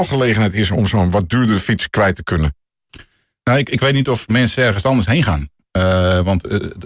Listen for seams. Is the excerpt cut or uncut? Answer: uncut